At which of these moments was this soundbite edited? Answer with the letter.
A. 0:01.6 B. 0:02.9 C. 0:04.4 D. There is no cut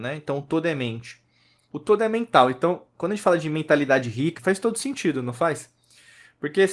C